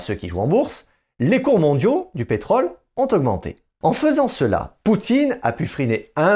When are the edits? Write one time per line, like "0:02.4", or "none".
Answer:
0:03.8